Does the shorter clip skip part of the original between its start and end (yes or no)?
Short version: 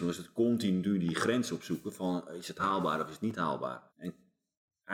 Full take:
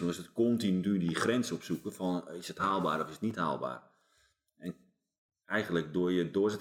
yes